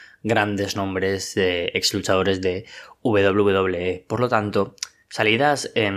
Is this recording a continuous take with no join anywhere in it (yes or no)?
yes